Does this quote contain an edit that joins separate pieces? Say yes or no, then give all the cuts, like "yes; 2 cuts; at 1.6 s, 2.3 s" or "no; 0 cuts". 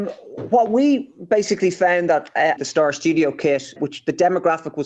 yes; 2 cuts; at 2.6 s, 3.8 s